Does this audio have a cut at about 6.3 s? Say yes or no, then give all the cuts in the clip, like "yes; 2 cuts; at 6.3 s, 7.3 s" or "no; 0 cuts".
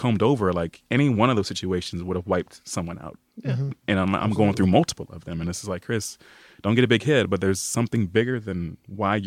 no; 0 cuts